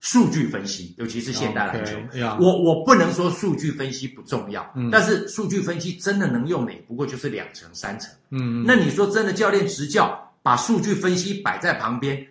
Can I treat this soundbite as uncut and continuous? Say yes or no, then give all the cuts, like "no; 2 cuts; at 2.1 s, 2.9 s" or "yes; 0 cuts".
yes; 0 cuts